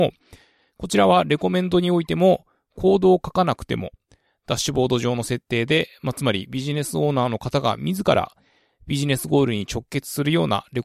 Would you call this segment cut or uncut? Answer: uncut